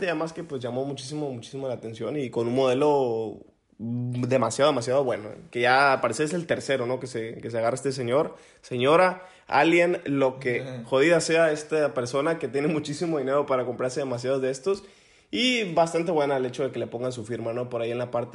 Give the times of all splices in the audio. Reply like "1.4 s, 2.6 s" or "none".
none